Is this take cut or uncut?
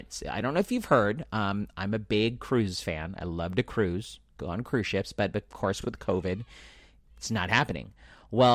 uncut